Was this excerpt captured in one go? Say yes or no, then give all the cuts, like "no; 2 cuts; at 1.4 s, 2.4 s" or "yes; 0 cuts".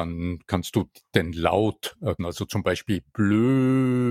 no; 1 cut; at 2.2 s